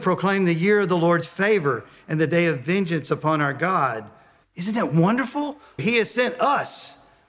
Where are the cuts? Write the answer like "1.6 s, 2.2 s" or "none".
4.4 s, 5.8 s